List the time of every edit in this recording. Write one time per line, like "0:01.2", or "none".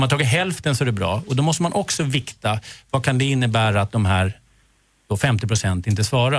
none